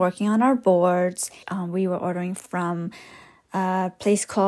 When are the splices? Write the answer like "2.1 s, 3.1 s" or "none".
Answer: 1.4 s